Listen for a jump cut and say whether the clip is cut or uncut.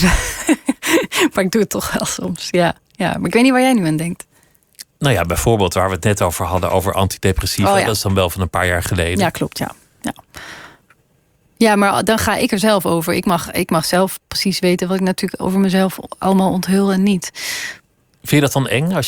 uncut